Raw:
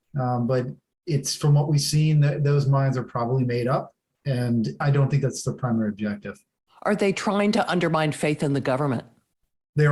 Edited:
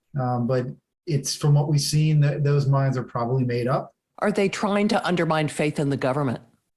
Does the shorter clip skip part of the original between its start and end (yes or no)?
yes